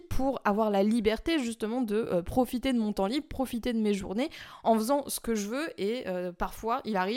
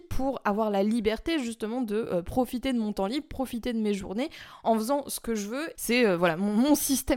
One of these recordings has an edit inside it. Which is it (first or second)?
second